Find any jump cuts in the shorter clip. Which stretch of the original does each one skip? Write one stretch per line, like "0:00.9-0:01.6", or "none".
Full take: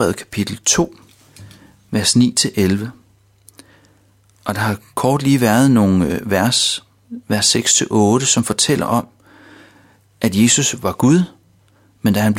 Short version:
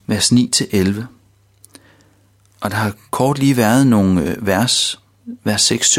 none